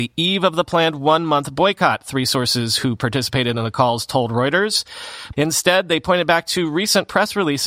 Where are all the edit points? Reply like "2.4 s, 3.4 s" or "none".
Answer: 5.3 s